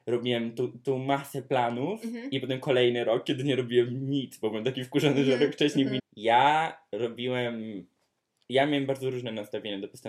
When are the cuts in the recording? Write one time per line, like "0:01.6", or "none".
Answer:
0:06.0